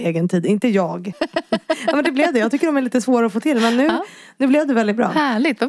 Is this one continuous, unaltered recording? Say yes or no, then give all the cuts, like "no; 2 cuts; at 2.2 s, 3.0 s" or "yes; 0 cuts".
no; 1 cut; at 1.1 s